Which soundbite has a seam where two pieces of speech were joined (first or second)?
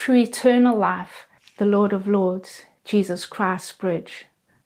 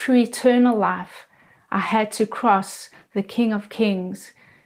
first